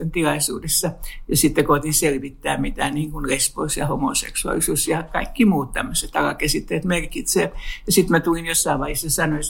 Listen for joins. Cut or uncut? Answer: uncut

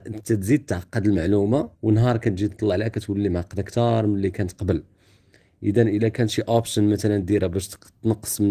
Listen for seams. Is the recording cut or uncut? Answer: cut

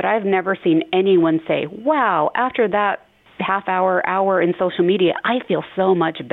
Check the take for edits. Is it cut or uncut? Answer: uncut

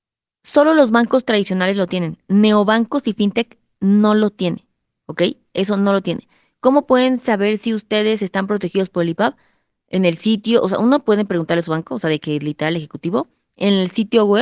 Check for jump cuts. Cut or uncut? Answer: uncut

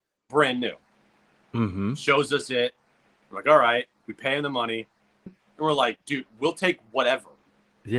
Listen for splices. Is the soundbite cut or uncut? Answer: cut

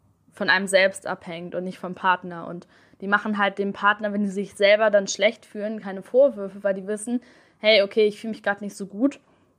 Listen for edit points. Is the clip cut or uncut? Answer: uncut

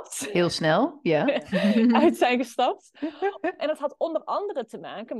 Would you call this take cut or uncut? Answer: cut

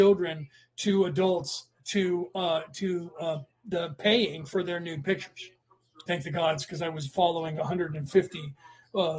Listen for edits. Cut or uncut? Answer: cut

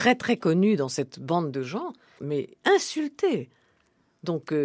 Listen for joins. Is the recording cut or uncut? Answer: cut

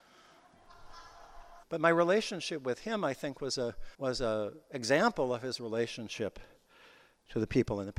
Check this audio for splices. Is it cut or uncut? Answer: cut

